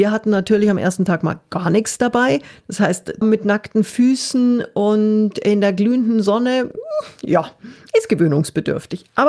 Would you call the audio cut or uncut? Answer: cut